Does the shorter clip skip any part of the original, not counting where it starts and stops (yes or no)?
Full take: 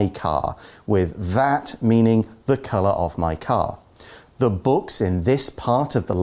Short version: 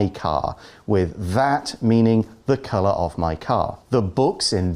yes